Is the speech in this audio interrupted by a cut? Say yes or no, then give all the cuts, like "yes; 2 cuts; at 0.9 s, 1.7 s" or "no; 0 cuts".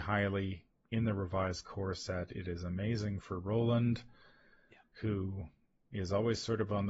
no; 0 cuts